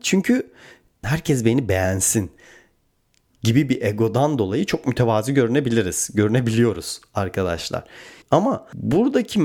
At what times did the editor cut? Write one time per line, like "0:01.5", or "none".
0:01.0
0:08.2